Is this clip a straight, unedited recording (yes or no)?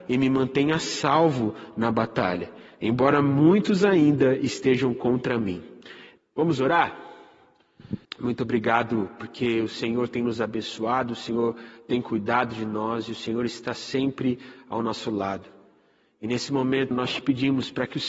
no